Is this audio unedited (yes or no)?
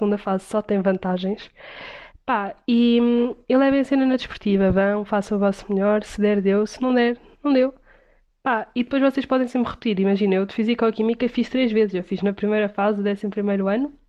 yes